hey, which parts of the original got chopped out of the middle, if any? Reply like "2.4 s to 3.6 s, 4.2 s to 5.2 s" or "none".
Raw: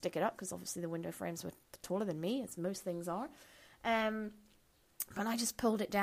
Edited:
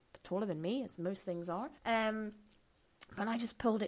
3.4 s to 3.8 s